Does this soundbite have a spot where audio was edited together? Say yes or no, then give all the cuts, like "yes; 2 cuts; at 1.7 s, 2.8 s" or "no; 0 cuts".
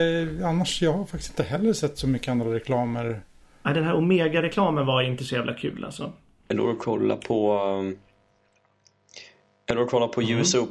no; 0 cuts